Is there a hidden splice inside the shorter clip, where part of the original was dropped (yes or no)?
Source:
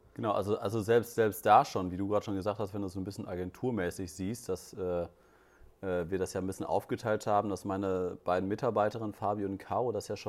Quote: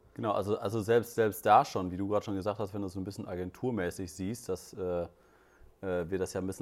no